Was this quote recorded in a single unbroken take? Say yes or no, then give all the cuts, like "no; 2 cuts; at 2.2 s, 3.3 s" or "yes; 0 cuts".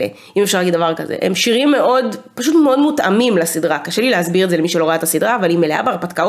yes; 0 cuts